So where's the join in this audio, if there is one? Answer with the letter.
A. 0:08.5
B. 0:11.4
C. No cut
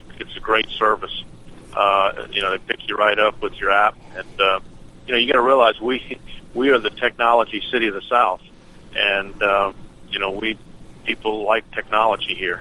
C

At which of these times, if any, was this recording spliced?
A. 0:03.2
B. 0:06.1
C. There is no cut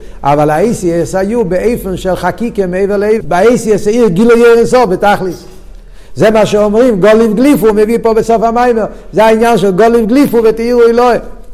A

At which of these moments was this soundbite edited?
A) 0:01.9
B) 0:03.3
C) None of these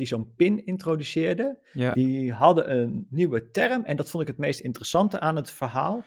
C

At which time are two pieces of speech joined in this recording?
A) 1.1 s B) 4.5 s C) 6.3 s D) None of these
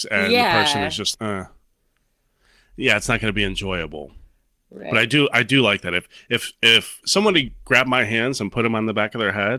A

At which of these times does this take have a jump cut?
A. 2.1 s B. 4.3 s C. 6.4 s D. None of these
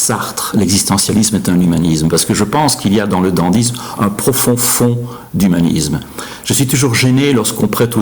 D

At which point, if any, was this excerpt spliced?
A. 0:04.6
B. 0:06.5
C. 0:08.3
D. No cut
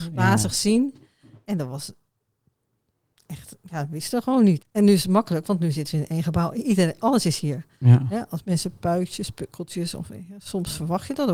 A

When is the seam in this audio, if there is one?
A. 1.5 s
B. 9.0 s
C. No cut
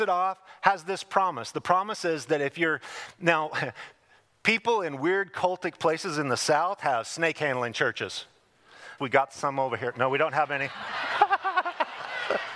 B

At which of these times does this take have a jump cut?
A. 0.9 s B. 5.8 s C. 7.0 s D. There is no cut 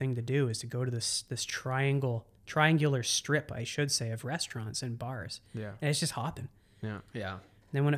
C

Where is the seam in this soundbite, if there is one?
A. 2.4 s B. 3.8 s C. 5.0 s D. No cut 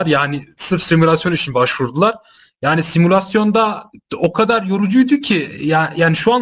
D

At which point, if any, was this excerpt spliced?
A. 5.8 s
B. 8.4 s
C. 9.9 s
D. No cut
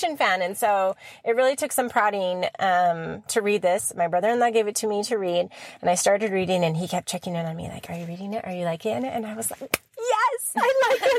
D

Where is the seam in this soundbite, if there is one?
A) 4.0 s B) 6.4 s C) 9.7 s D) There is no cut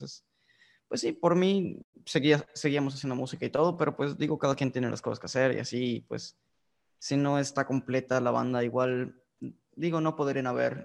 C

